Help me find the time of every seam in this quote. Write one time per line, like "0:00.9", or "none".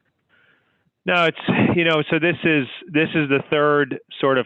none